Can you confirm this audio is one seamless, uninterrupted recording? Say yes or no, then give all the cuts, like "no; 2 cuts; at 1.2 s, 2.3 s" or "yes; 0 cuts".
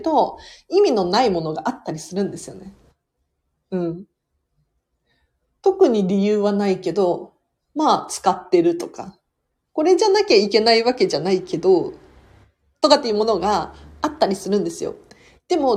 yes; 0 cuts